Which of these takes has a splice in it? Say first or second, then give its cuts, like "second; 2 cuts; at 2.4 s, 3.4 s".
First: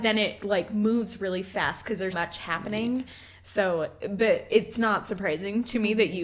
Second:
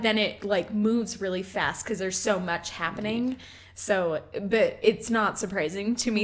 first; 1 cut; at 2.1 s